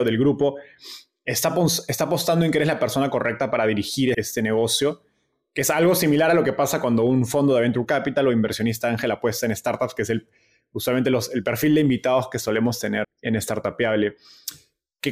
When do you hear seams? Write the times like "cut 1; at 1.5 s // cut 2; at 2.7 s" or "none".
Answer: cut 1; at 4.1 s // cut 2; at 13.0 s